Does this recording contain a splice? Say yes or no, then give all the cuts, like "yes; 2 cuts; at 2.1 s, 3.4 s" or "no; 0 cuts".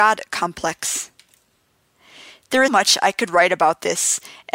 yes; 1 cut; at 2.7 s